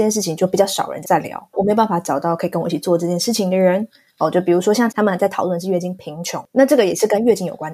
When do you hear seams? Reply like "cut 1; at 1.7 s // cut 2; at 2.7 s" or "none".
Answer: cut 1; at 1.0 s // cut 2; at 4.9 s